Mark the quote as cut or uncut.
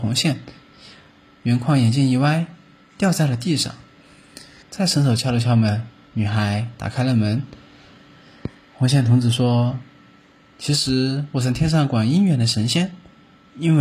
cut